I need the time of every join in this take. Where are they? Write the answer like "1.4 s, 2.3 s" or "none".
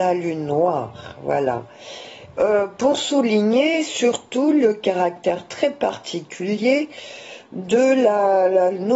2.3 s